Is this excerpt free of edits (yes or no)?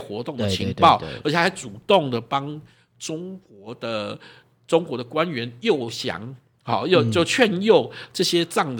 yes